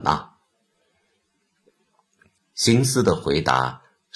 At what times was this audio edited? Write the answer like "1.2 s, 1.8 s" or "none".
2.4 s